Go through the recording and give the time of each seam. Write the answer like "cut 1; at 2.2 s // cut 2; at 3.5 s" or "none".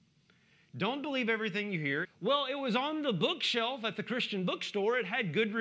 cut 1; at 2.0 s